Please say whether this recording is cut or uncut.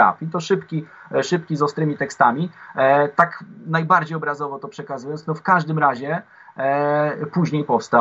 uncut